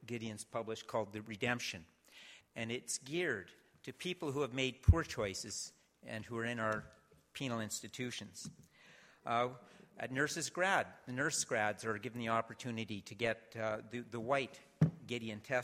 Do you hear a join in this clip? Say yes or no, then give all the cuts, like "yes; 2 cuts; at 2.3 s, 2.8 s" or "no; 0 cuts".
yes; 1 cut; at 2.4 s